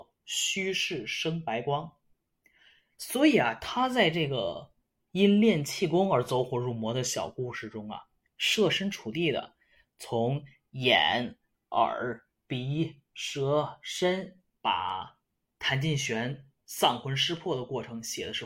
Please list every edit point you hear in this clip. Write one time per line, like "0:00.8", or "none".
0:14.5

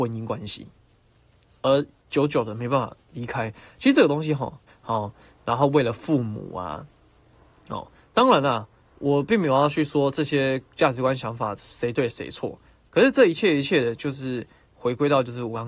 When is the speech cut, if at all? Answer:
0:04.7

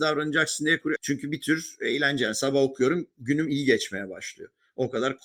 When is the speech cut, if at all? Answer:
0:01.0

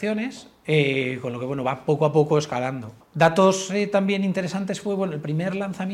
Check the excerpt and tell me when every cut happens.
0:03.0

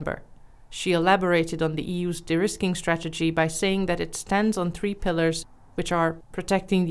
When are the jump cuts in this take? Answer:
none

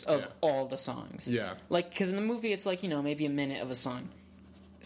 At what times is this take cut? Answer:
none

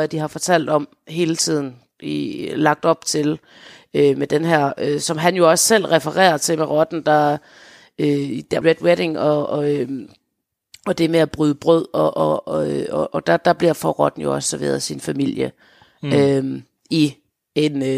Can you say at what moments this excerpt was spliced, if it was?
0:08.6

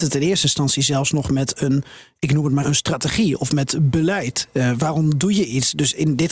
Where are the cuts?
0:02.6

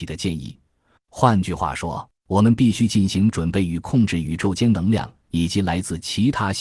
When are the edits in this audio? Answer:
0:01.0
0:02.2

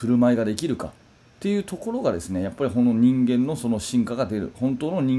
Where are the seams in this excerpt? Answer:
none

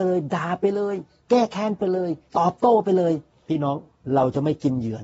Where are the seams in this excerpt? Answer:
0:02.3

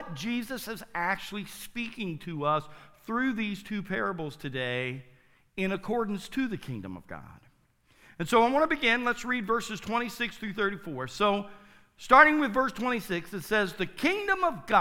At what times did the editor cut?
none

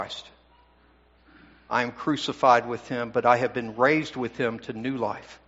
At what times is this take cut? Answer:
none

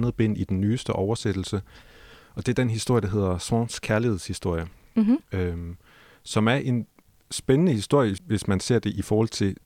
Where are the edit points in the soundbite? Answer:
0:08.2

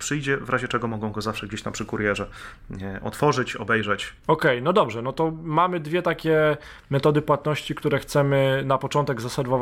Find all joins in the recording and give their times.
none

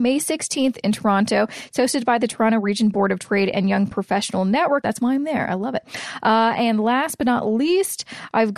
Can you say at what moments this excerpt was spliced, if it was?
0:04.8

